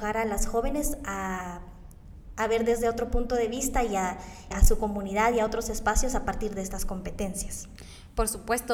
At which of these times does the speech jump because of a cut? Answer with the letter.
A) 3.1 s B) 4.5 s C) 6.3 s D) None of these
B